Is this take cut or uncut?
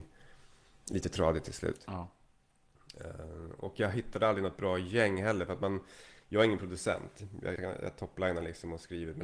cut